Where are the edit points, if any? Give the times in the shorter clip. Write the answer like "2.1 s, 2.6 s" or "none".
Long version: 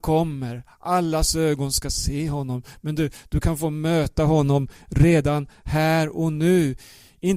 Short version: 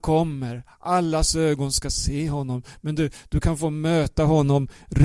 none